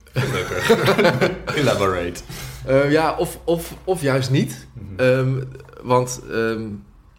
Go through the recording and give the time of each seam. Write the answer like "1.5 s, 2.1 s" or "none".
none

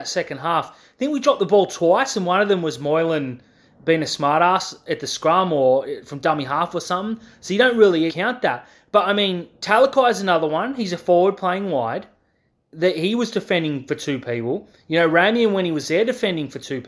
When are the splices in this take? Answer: 8.1 s

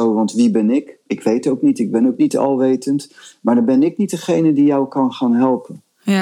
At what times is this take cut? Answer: none

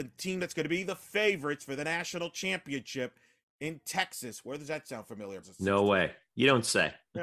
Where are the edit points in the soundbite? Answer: 5.4 s

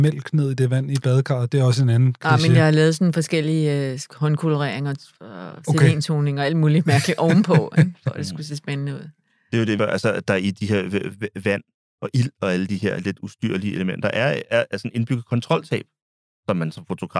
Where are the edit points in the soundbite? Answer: 9.8 s

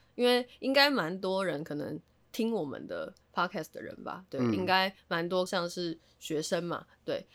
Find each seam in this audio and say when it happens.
5.5 s

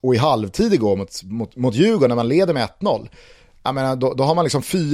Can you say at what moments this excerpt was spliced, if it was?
none

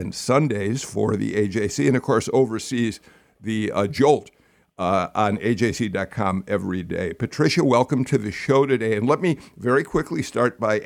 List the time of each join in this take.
none

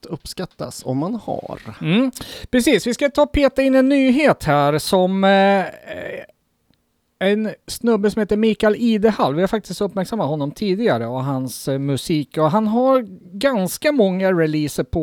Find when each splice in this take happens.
none

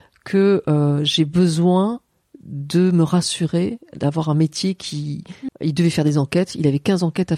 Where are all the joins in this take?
5.5 s

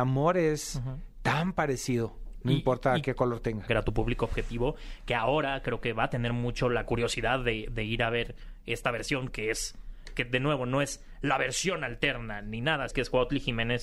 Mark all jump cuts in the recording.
3.7 s, 12.9 s

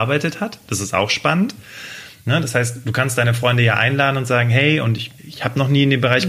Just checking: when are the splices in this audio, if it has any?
5.2 s

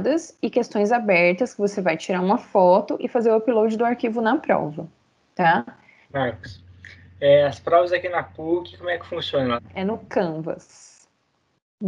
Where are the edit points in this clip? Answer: 6.1 s, 9.6 s

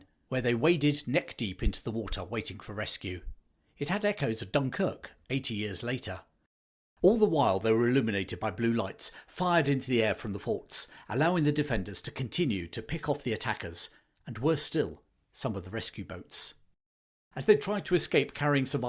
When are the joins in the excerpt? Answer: none

